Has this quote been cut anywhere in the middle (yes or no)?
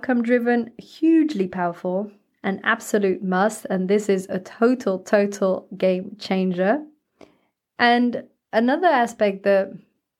no